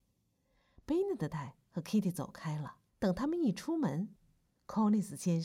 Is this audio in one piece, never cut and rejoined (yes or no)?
no